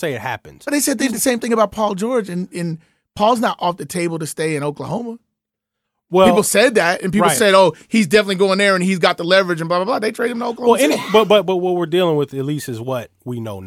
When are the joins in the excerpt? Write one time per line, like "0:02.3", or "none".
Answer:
none

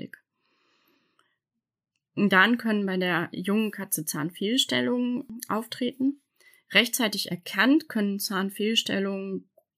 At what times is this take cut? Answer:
none

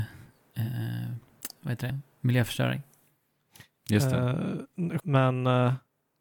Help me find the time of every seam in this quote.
0:01.9
0:05.0

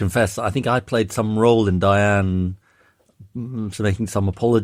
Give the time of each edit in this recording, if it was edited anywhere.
none

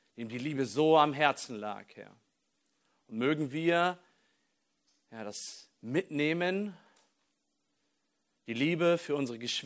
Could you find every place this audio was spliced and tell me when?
none

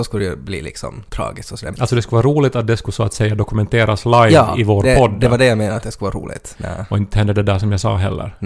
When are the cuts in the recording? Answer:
0:01.7
0:06.6

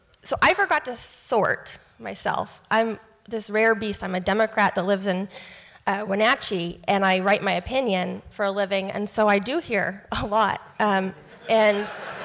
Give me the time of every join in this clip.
none

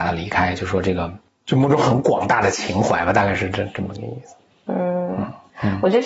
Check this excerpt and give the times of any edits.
none

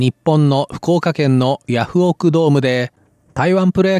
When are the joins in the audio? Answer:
none

